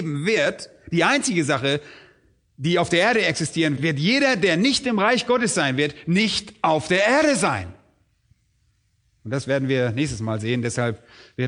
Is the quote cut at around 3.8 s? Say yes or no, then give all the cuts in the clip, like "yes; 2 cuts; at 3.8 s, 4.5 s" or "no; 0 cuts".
yes; 1 cut; at 3.8 s